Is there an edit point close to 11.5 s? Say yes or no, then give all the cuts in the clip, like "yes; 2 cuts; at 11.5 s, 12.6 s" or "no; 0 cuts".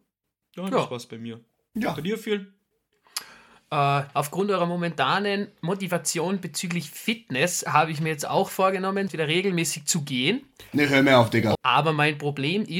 yes; 3 cuts; at 4.1 s, 9.1 s, 11.5 s